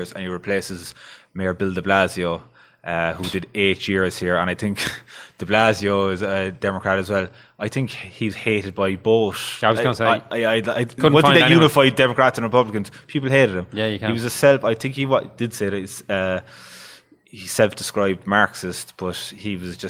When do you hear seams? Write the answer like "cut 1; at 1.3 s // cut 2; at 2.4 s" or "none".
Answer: none